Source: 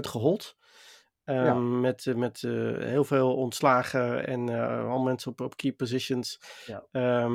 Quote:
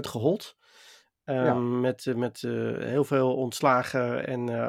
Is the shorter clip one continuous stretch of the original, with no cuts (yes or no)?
yes